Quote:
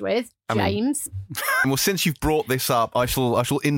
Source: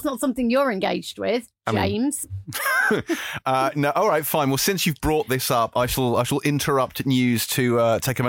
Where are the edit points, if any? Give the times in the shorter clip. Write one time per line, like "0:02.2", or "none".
0:01.6